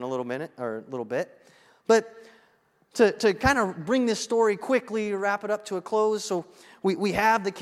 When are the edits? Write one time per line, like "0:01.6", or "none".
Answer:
none